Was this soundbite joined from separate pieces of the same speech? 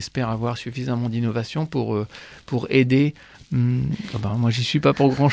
yes; 1 cut; at 3.3 s

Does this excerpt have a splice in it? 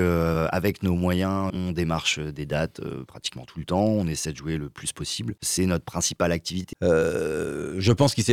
yes; 3 cuts; at 1.5 s, 5.4 s, 6.7 s

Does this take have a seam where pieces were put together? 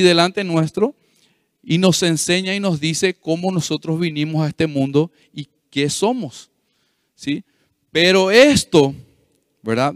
no; 0 cuts

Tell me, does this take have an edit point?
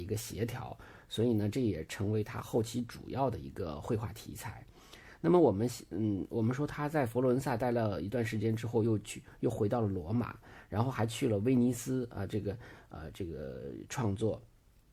no; 0 cuts

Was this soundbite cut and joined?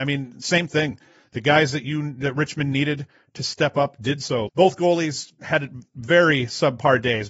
yes; 1 cut; at 4.5 s

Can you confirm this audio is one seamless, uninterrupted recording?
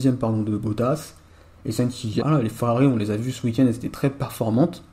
no; 1 cut; at 2.2 s

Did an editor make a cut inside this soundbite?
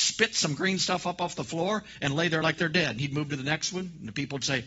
no; 0 cuts

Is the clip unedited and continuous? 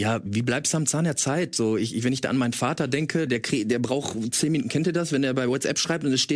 no; 1 cut; at 3.3 s

